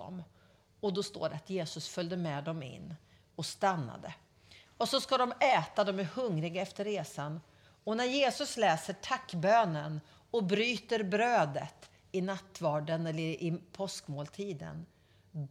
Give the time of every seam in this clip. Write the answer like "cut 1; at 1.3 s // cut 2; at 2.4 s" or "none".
none